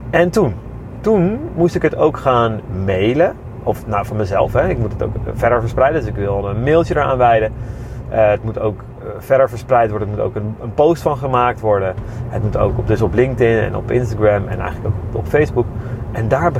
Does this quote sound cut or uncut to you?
uncut